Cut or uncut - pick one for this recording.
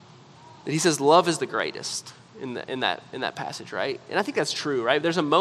uncut